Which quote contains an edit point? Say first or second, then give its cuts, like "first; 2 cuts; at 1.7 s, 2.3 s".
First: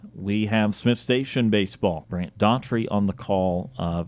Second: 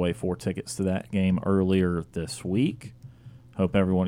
first; 1 cut; at 2.0 s